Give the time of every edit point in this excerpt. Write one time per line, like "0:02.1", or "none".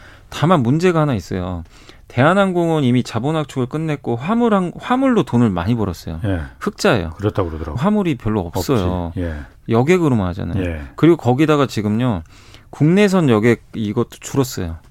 0:07.8

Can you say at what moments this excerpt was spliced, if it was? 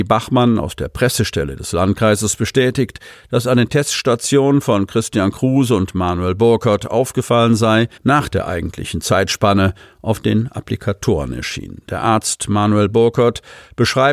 0:08.0

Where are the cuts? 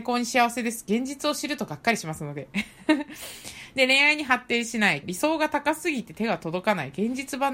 0:05.0

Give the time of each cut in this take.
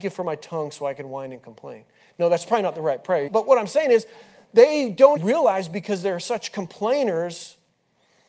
0:03.3
0:05.2

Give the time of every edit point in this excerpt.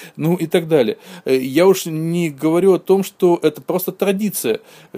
none

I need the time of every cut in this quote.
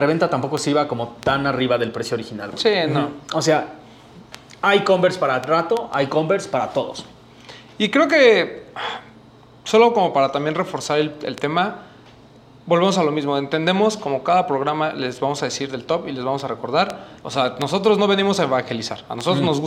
0:17.2

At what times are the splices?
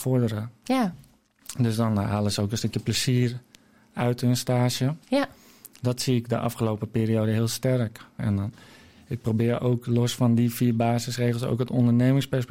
0:08.2

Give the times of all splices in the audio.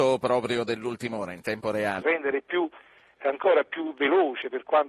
0:02.0

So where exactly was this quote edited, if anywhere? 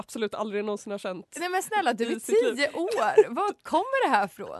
none

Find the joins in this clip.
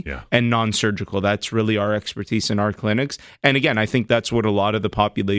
none

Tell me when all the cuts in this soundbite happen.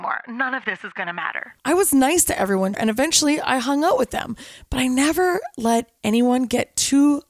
0:01.6
0:02.7

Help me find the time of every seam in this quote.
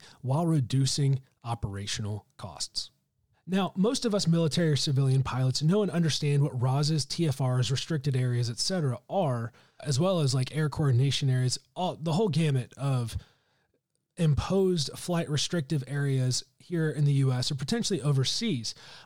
0:03.3
0:09.8

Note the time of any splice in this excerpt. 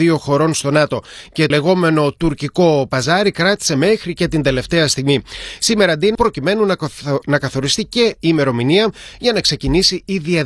0:01.5
0:06.2

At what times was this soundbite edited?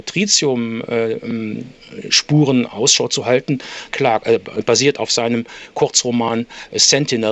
0:03.9

